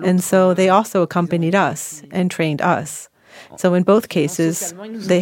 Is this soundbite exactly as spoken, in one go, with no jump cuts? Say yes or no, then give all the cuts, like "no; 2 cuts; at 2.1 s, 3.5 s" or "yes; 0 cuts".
yes; 0 cuts